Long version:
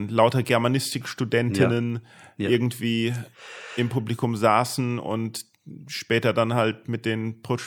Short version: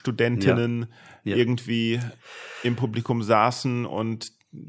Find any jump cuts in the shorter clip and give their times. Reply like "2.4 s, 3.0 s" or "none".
none